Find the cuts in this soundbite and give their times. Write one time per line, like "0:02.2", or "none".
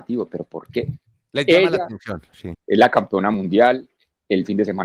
0:02.5